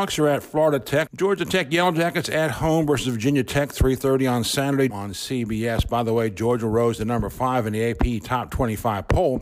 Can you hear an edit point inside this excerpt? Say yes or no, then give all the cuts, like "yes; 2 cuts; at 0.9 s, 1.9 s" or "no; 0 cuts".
yes; 2 cuts; at 1.1 s, 4.9 s